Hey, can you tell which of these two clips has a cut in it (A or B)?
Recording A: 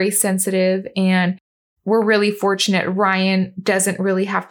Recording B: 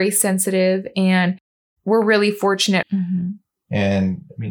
B